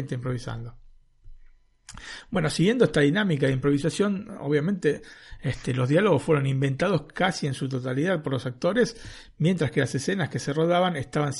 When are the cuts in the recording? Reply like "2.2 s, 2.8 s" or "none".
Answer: none